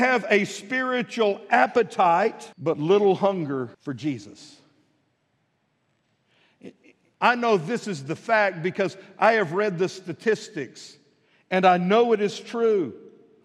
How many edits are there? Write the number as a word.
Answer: three